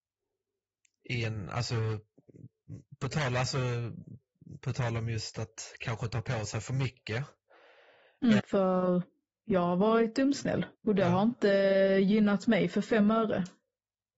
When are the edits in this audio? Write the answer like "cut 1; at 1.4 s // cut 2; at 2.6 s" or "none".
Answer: cut 1; at 8.4 s // cut 2; at 10.7 s